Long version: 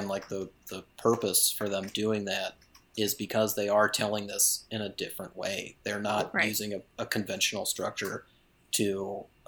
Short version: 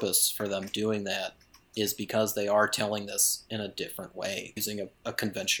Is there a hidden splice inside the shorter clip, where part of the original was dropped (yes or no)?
yes